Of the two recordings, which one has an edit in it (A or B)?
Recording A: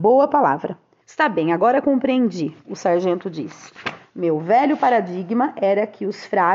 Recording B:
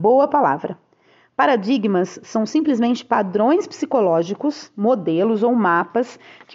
A